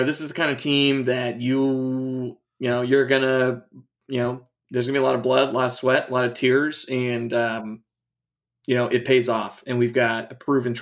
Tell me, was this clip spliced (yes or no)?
no